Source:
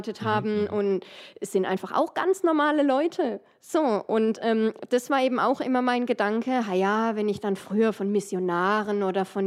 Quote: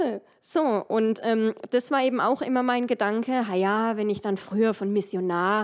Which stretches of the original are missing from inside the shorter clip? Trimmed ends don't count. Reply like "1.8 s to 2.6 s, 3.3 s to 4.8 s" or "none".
none